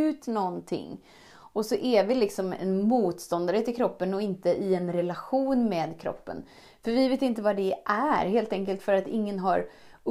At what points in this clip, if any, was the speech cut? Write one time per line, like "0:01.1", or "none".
none